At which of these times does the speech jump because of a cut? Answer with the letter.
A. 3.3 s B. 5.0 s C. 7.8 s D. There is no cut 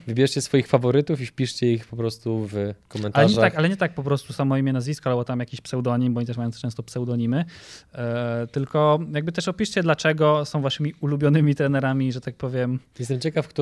D